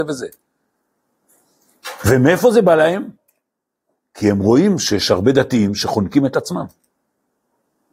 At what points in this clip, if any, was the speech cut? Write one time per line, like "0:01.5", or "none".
none